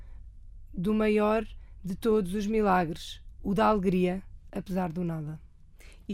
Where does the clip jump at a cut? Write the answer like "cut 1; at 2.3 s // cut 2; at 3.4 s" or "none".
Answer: cut 1; at 4.5 s